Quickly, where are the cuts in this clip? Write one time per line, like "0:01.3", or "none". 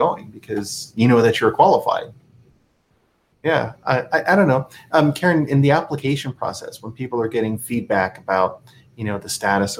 none